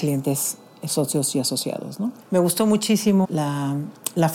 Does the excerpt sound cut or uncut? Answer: cut